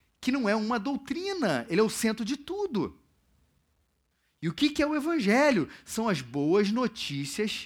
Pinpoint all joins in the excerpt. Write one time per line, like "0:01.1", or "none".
none